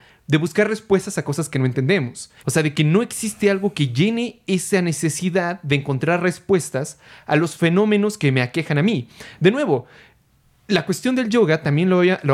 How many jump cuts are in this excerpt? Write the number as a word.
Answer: one